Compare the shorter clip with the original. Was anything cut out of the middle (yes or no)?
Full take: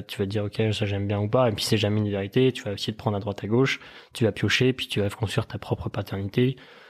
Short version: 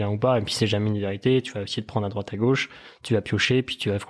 no